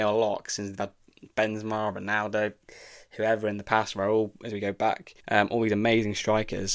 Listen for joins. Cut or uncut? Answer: cut